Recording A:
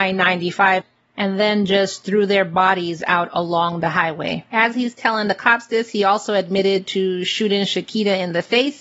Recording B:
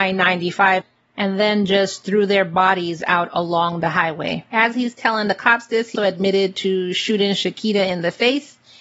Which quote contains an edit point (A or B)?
B